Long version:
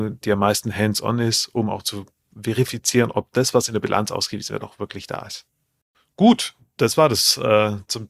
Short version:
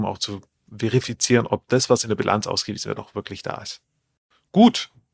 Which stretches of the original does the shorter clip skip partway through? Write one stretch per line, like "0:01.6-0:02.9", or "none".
none